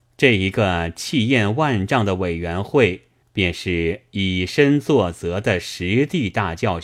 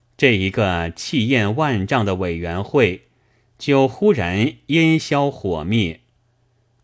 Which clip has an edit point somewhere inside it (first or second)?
first